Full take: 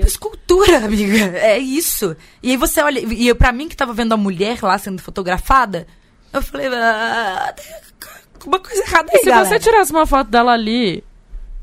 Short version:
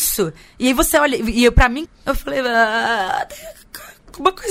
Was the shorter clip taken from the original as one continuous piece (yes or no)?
no